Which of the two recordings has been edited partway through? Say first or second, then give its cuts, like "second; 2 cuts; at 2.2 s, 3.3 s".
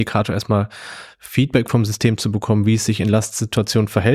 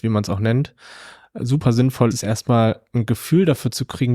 second; 1 cut; at 2.1 s